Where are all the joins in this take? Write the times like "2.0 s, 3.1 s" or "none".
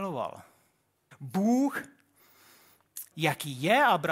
1.1 s, 3.1 s